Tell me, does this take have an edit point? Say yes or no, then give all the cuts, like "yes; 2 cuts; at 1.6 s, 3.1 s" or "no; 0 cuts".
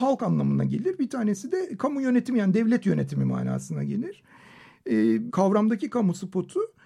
yes; 1 cut; at 5.3 s